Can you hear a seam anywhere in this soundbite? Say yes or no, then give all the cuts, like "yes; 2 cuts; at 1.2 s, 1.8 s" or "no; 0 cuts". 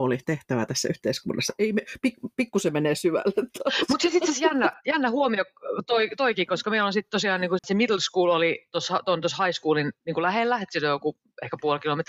yes; 1 cut; at 7.6 s